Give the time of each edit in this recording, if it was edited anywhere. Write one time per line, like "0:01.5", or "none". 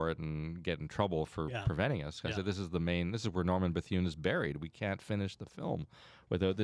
none